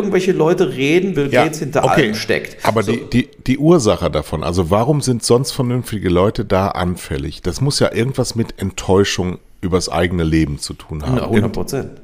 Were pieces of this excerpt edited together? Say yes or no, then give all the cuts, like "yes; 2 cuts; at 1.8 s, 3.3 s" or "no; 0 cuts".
yes; 1 cut; at 1.1 s